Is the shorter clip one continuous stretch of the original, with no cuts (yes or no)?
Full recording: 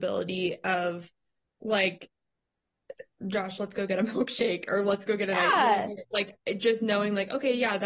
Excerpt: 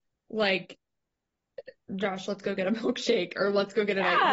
yes